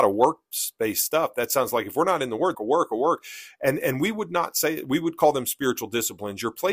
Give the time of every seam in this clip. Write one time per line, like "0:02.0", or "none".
0:02.5